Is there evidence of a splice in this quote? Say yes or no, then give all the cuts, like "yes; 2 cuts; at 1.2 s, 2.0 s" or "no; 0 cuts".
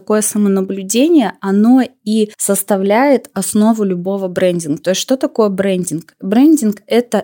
no; 0 cuts